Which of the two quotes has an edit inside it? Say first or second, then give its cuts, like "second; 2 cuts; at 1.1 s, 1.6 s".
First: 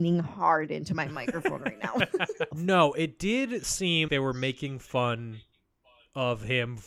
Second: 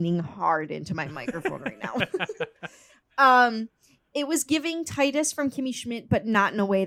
first; 2 cuts; at 2.5 s, 4.1 s